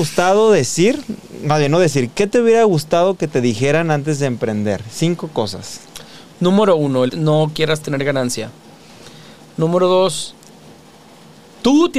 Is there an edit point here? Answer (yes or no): yes